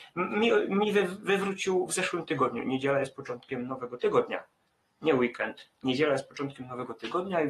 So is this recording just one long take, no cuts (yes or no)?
yes